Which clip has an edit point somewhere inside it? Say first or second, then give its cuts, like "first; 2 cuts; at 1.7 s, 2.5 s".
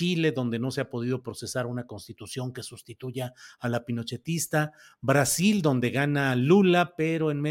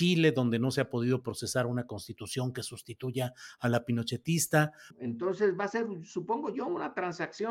second; 1 cut; at 4.9 s